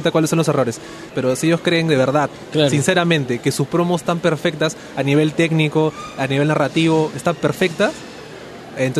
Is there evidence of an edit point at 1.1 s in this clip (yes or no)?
yes